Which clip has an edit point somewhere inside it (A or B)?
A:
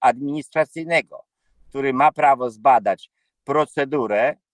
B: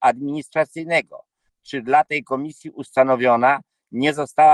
B